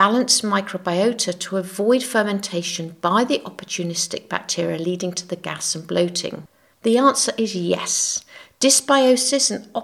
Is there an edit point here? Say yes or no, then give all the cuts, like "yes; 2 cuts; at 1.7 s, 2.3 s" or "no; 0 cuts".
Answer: yes; 1 cut; at 6.7 s